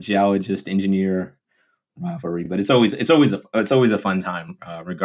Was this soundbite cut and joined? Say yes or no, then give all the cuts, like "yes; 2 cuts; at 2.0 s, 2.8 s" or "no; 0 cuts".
no; 0 cuts